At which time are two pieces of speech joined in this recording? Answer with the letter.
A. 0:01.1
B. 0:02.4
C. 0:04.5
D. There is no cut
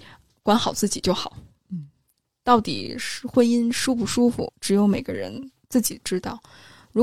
C